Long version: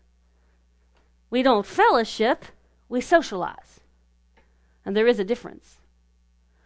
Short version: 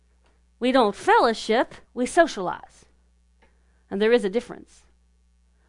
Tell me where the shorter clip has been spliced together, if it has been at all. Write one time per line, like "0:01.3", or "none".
0:01.8